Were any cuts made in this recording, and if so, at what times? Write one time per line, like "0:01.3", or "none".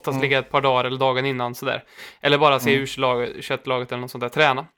none